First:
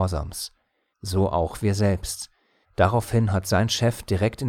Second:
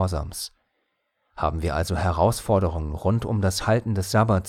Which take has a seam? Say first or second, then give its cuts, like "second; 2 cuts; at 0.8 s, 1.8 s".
first; 2 cuts; at 0.9 s, 2.6 s